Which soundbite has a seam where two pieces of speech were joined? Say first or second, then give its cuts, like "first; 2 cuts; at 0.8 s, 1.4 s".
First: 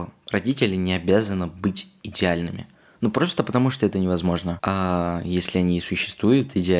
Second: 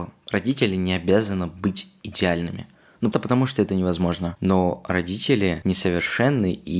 second; 2 cuts; at 3.1 s, 4.4 s